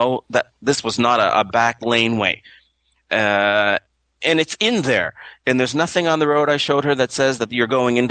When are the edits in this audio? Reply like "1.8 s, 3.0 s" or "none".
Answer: none